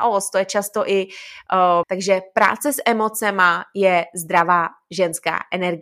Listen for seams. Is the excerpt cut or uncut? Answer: cut